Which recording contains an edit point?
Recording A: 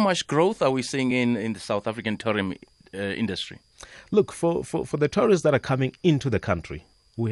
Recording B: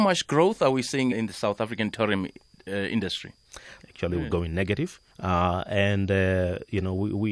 B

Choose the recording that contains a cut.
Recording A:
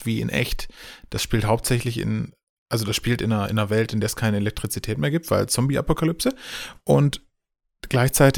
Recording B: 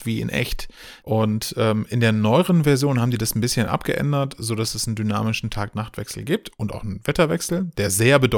B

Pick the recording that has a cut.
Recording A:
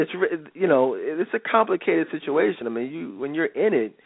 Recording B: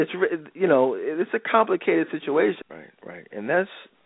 B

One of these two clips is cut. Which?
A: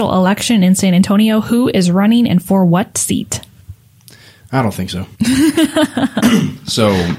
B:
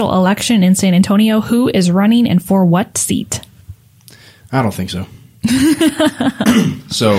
A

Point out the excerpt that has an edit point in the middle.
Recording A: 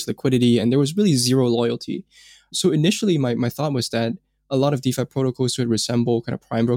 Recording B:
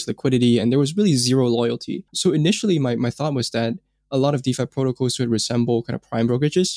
B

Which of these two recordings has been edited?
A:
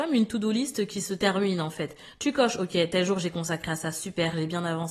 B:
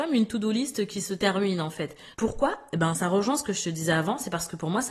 B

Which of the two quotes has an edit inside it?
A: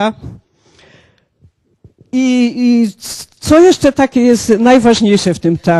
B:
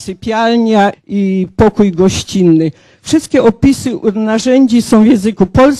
B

